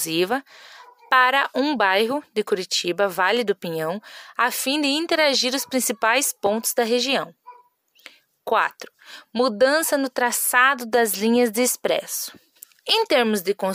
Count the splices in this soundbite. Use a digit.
1